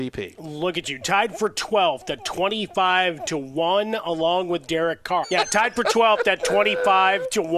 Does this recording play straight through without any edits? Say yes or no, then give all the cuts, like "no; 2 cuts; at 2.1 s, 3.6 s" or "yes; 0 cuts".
no; 1 cut; at 5.2 s